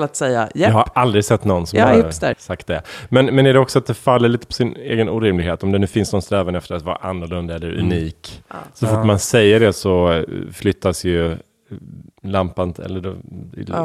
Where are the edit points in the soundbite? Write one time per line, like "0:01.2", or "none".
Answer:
0:02.3